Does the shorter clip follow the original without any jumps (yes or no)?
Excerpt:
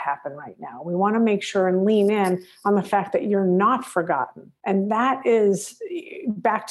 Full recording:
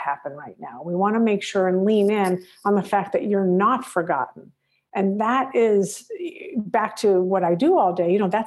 no